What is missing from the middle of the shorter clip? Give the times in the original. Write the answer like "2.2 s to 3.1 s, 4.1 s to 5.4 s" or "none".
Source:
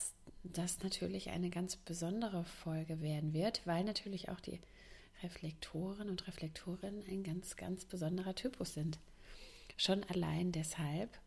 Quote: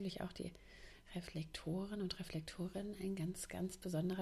none